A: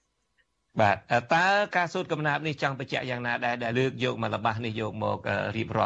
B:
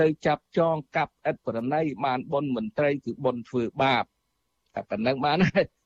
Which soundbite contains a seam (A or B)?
A